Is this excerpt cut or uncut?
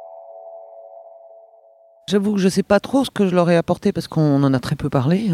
uncut